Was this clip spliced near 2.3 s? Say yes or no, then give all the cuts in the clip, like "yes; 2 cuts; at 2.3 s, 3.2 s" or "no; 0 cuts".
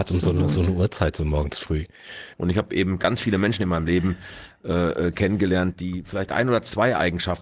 yes; 1 cut; at 2.3 s